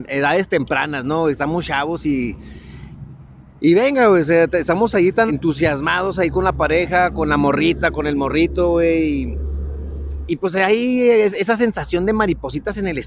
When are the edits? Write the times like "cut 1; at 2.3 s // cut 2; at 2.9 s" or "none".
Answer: cut 1; at 5.3 s